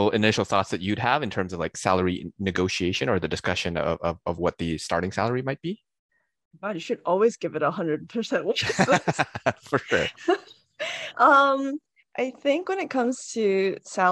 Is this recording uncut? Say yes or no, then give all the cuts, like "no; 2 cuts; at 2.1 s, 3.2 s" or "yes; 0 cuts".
yes; 0 cuts